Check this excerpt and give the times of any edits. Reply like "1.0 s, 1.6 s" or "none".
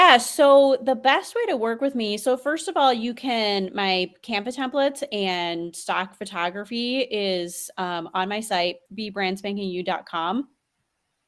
8.9 s

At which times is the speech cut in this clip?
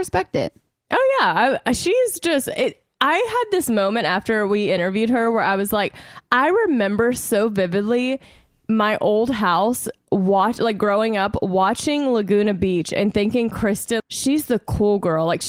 14.0 s

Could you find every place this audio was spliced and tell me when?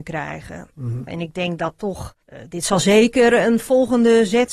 1.1 s, 2.2 s

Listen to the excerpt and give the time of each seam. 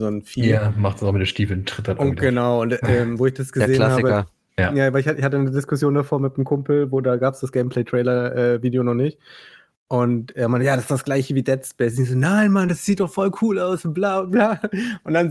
none

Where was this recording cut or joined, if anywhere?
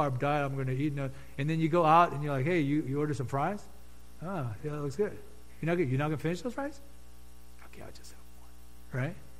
none

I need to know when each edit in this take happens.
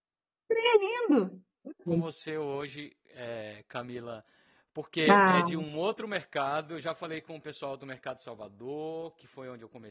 1.9 s

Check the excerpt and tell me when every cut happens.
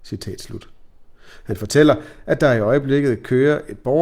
none

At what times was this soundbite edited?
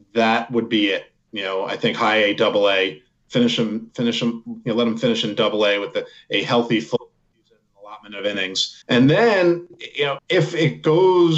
8.8 s, 10.2 s

